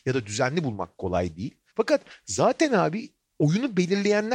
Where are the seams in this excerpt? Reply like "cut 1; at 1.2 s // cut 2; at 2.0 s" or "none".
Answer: cut 1; at 1.7 s